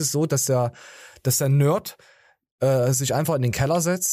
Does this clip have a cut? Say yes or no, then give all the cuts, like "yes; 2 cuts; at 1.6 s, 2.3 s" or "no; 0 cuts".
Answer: no; 0 cuts